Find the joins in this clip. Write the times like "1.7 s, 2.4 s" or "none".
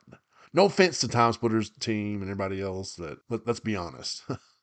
3.2 s

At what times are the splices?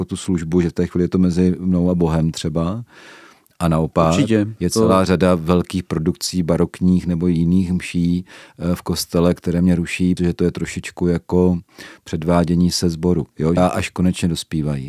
10.2 s, 13.6 s

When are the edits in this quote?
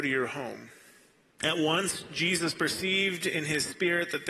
1.4 s

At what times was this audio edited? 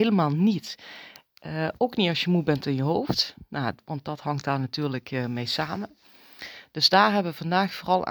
none

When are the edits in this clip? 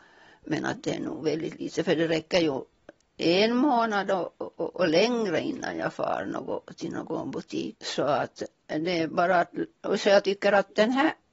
7.7 s

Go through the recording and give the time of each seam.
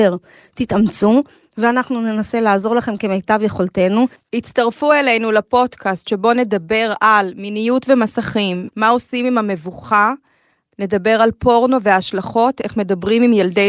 8.7 s

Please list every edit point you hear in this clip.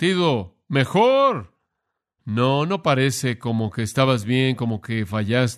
none

